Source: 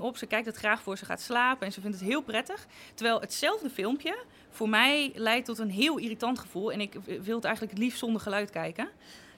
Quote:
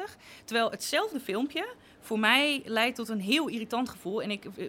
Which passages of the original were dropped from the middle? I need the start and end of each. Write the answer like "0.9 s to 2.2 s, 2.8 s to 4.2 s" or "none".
none